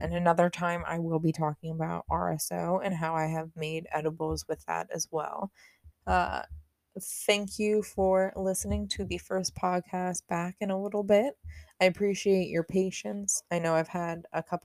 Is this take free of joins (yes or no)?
no